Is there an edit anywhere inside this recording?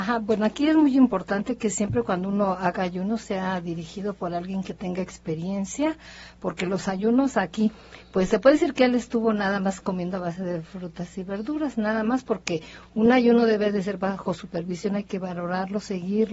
no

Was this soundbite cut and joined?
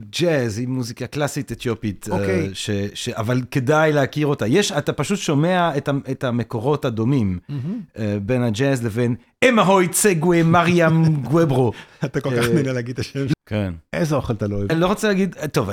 yes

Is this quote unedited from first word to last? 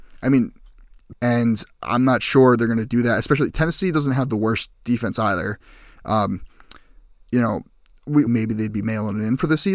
no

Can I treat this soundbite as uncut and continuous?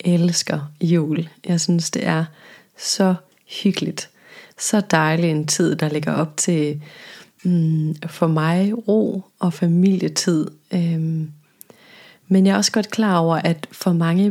yes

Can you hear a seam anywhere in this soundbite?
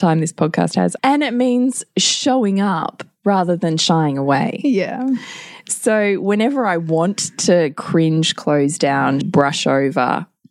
yes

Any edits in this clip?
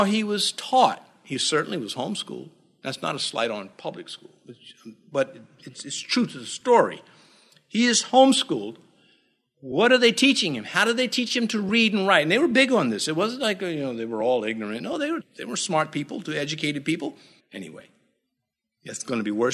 yes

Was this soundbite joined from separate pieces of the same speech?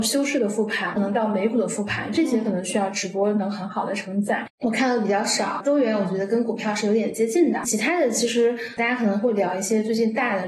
yes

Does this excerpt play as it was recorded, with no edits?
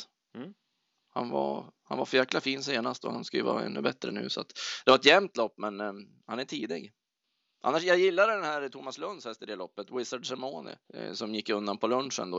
no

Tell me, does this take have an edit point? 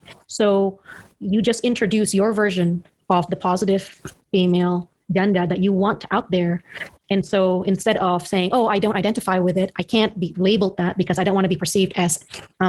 no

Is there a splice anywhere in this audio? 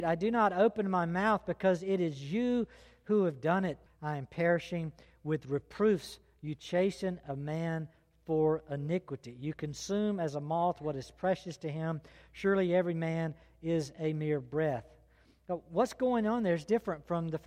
yes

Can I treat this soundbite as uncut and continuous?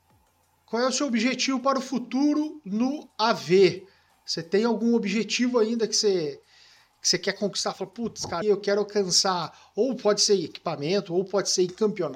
no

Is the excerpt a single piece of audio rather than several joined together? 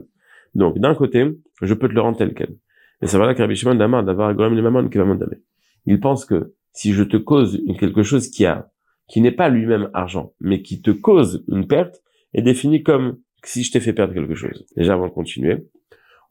no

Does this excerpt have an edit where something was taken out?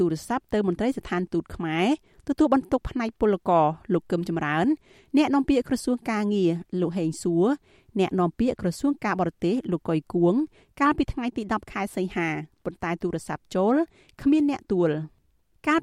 yes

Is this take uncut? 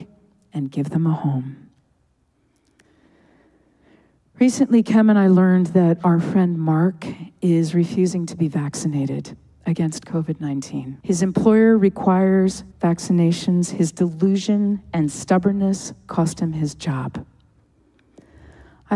no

